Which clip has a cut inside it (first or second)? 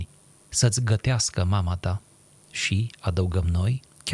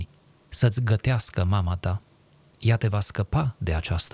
first